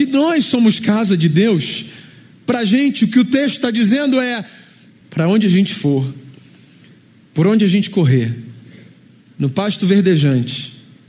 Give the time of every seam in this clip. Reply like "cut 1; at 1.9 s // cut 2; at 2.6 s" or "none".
cut 1; at 5.0 s